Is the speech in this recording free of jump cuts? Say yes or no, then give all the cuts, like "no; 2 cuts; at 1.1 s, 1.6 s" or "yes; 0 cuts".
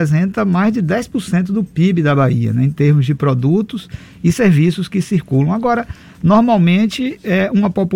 yes; 0 cuts